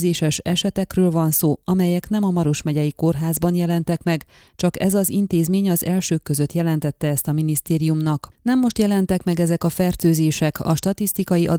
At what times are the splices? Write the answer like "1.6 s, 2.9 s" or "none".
none